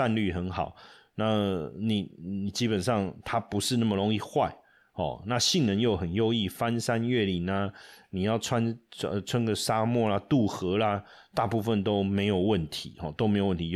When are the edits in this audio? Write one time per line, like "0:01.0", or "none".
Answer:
none